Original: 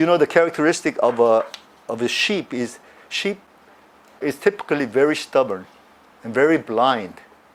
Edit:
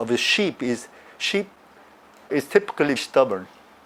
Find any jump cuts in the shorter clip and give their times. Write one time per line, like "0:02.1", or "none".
0:03.0